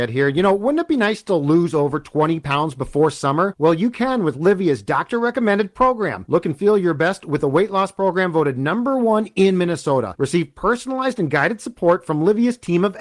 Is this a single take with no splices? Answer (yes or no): yes